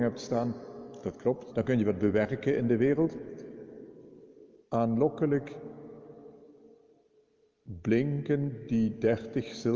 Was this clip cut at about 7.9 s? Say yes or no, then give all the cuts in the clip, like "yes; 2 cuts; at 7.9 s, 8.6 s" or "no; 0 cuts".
no; 2 cuts; at 1.5 s, 4.6 s